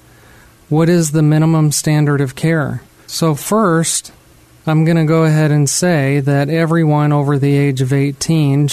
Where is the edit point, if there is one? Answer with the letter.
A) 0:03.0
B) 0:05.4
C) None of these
A